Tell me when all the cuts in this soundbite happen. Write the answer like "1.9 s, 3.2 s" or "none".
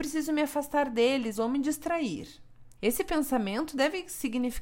1.3 s, 2.8 s